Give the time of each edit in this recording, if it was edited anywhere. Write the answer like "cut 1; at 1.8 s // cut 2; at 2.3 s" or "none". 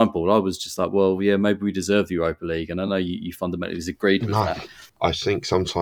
none